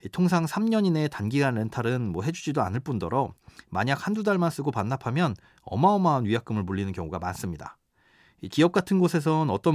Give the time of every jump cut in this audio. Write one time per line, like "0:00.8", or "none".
0:08.5